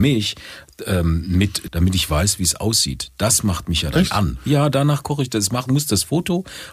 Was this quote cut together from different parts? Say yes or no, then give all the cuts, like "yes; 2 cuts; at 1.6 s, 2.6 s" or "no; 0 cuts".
yes; 1 cut; at 1.7 s